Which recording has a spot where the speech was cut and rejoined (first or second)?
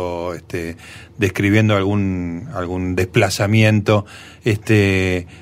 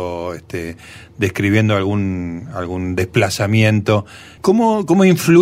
second